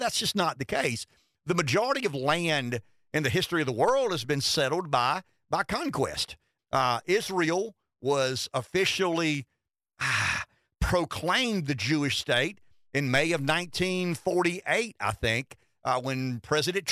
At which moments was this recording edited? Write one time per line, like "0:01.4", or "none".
0:06.6

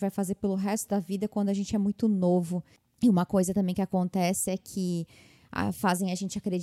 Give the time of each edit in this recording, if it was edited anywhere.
none

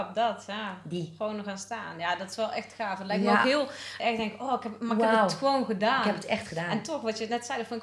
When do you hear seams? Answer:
0:04.0

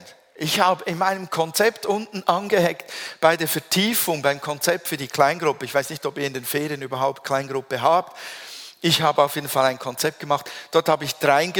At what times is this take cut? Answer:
none

